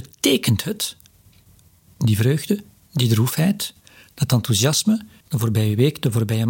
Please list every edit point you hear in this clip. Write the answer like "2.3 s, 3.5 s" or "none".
5.2 s

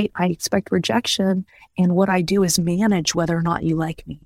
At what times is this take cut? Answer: none

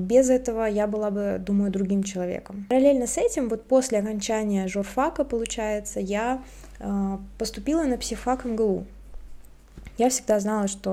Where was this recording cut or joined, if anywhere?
none

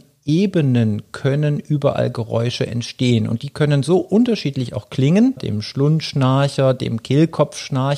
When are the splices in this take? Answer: 5.4 s

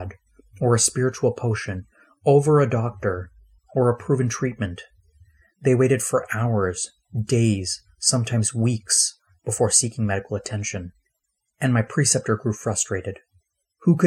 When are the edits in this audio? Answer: none

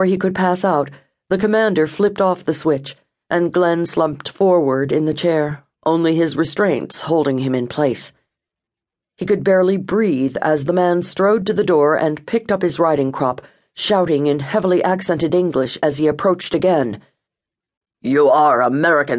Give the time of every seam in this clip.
9.0 s

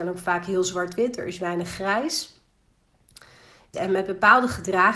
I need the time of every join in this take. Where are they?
3.7 s

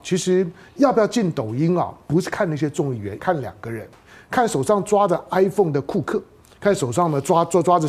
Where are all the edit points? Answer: 3.2 s

